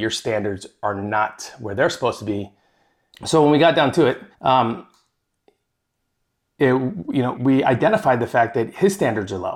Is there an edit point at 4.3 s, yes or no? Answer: yes